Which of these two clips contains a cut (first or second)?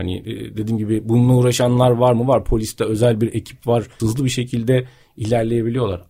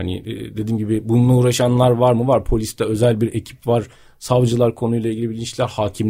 first